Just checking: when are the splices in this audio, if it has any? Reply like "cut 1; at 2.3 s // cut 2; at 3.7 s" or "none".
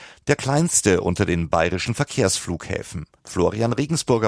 cut 1; at 3.2 s